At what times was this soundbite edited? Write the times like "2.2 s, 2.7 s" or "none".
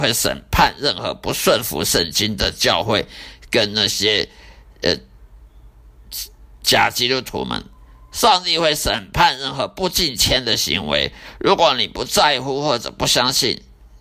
none